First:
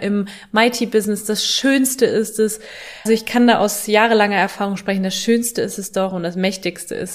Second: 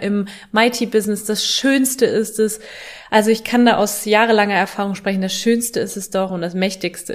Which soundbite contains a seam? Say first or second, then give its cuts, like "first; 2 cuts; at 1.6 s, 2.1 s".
first; 1 cut; at 3.1 s